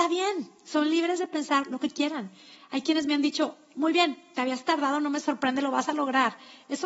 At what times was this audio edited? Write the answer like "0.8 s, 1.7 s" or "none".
none